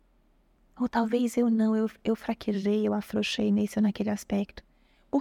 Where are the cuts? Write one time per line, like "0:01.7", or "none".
none

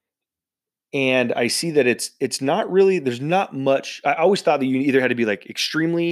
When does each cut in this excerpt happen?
none

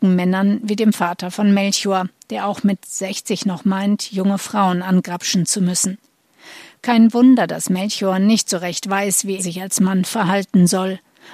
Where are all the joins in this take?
0:09.4

